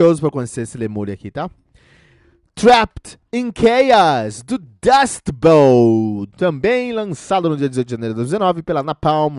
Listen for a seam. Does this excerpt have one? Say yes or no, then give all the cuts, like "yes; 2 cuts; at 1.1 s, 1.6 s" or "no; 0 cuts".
no; 0 cuts